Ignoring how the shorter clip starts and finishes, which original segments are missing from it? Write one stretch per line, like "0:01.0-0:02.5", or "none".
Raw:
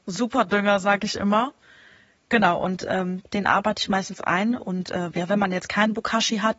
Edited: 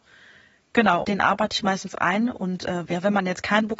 0:02.6-0:03.3